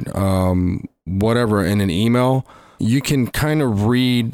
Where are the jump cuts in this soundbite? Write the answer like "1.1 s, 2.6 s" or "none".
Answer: 2.8 s